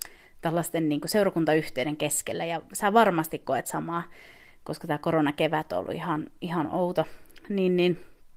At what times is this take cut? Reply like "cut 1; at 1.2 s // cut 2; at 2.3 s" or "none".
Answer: none